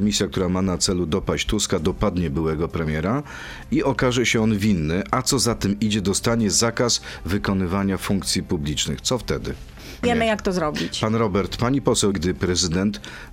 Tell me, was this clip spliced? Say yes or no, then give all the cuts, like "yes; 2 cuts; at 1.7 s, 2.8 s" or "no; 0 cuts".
yes; 2 cuts; at 10.0 s, 12.1 s